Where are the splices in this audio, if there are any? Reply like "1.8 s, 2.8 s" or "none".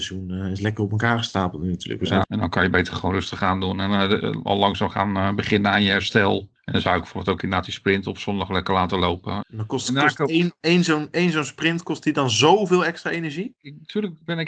2.2 s, 9.4 s, 13.6 s